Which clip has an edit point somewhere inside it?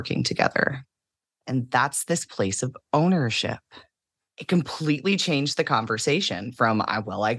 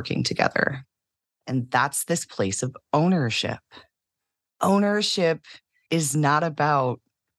first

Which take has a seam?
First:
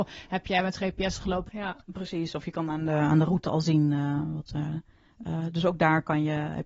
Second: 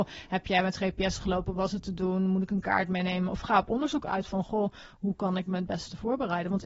first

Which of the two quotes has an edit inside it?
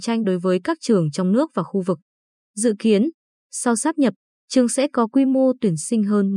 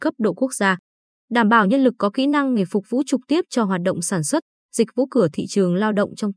second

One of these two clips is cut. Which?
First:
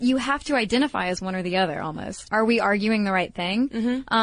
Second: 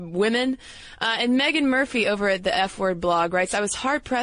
first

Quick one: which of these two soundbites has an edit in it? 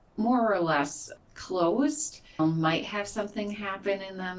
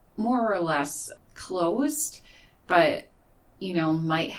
first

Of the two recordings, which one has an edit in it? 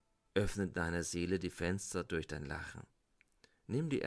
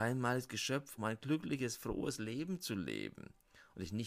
second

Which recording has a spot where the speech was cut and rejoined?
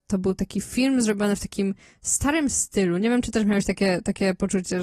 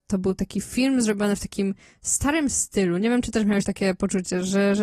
second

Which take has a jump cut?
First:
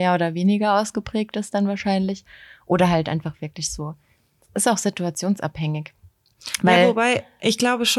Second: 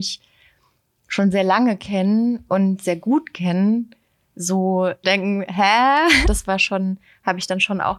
second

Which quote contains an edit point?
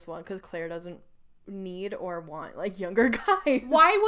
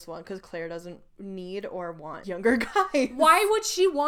second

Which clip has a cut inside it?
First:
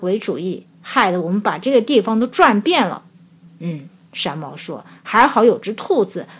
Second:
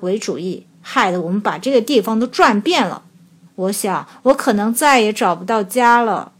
second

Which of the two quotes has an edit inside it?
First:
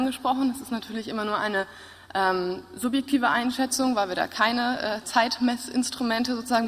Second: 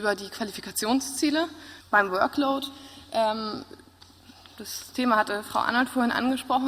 second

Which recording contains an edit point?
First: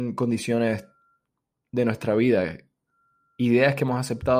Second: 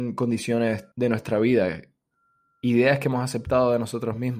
second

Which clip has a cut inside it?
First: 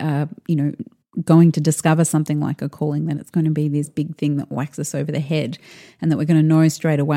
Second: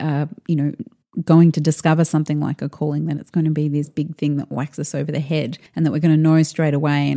second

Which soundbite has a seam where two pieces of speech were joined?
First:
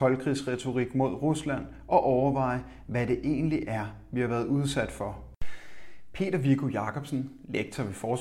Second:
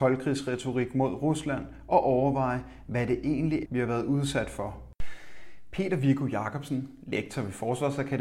second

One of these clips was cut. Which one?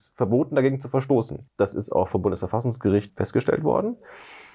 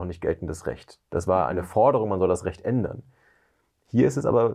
first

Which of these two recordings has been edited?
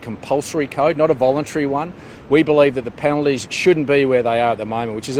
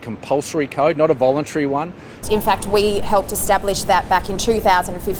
second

